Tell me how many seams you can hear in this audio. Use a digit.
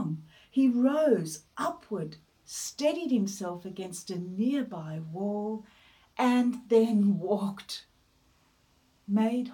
0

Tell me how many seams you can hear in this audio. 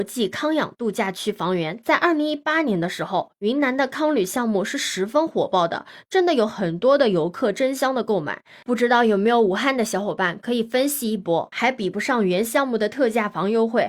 2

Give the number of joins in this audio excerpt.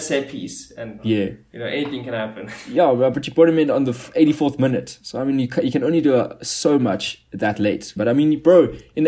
1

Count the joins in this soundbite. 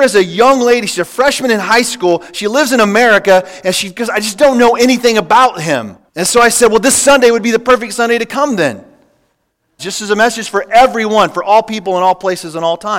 2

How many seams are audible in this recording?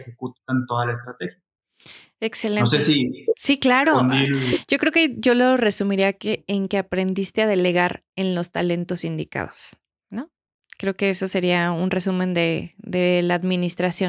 0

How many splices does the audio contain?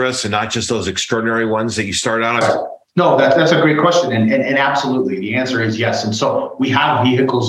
1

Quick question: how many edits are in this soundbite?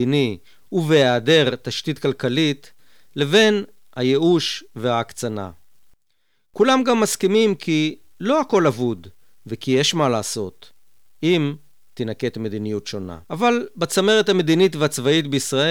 1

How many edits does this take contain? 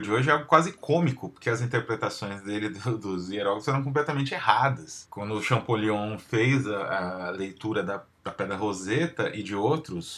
1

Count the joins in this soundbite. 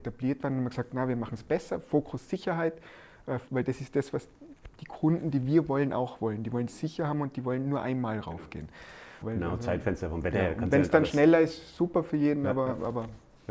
2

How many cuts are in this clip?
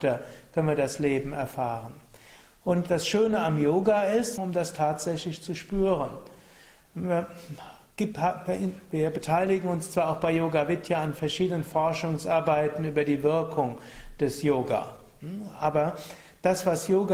1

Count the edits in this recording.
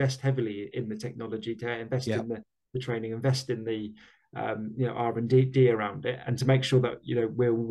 0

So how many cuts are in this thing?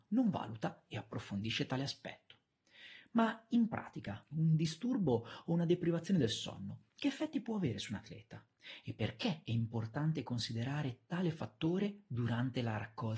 1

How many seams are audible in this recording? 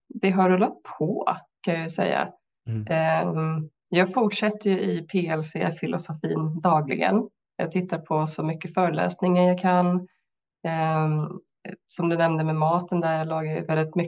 0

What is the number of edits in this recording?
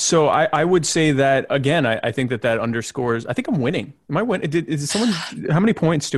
1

